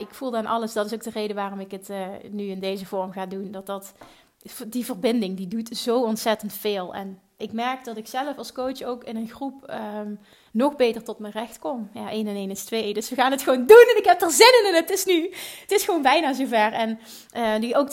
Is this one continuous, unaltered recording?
no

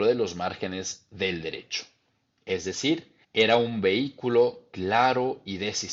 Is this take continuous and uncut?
no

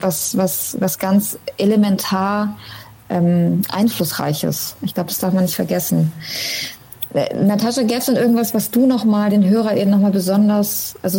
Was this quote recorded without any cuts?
yes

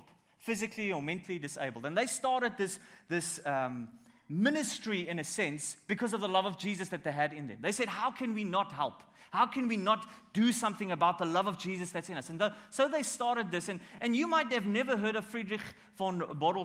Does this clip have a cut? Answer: no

